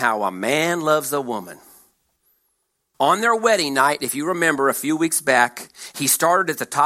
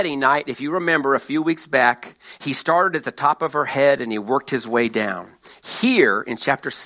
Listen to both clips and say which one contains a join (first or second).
first